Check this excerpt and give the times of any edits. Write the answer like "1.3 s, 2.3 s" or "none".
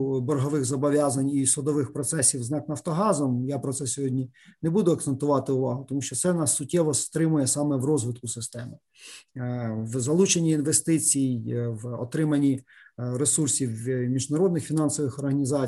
none